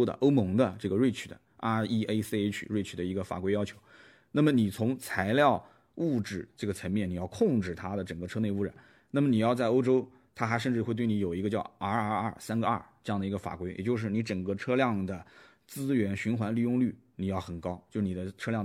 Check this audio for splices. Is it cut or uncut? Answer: uncut